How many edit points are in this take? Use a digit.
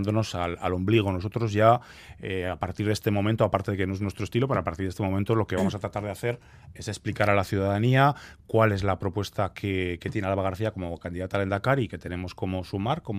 0